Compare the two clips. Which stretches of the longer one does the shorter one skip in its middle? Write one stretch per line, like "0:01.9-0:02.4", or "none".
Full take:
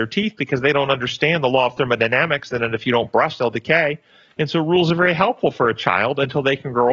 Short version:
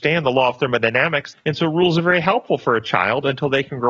0:02.5-0:04.3

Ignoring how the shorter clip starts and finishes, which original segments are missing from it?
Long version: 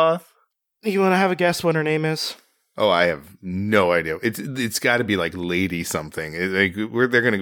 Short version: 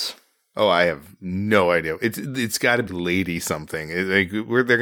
0:05.1-0:05.3

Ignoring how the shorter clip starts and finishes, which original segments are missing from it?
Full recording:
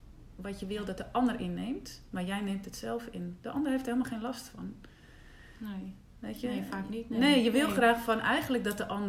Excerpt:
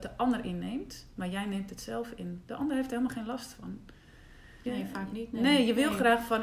0:05.6-0:06.4

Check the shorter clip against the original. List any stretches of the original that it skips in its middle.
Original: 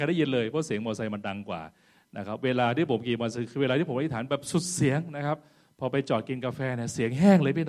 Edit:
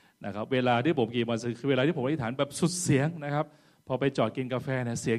none

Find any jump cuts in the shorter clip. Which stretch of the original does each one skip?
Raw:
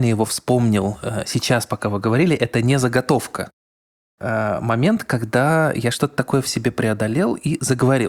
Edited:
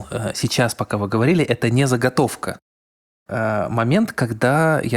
none

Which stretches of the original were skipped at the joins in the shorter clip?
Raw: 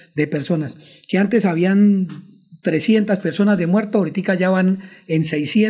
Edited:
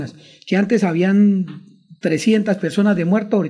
none

